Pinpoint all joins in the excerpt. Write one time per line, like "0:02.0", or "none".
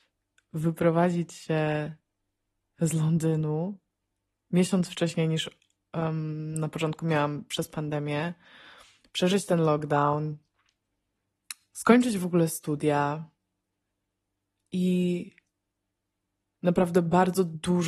none